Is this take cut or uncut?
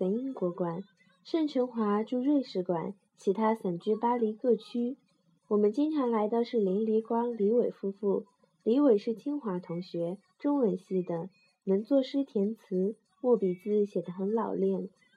uncut